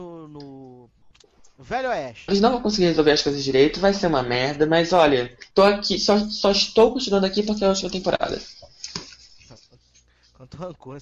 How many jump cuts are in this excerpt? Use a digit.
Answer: 2